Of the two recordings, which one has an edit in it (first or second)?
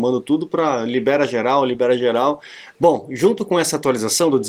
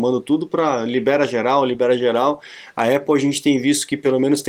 first